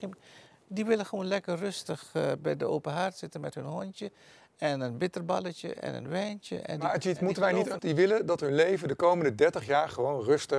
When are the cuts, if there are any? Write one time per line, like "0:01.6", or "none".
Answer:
0:07.8